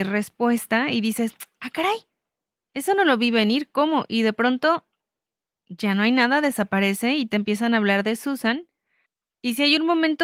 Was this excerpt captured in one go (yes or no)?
yes